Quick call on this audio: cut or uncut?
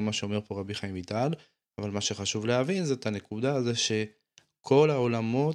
cut